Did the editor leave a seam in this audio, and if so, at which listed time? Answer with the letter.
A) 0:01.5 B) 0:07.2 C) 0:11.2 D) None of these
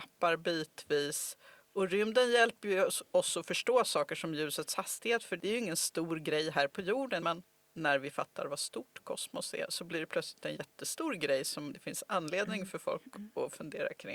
B